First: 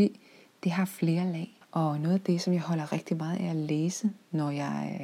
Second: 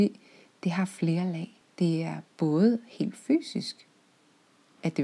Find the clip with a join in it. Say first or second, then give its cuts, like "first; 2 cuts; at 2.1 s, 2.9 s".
first; 1 cut; at 1.6 s